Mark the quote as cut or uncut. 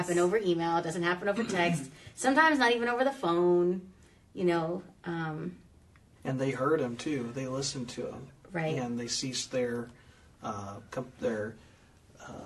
cut